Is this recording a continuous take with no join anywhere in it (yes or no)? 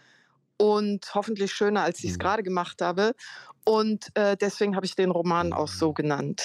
yes